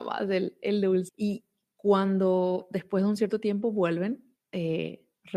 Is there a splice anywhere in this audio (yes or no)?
yes